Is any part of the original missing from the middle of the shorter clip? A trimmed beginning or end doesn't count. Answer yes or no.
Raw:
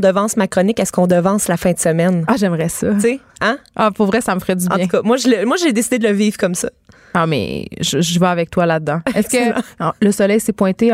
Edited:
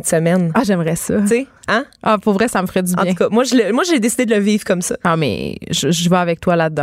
yes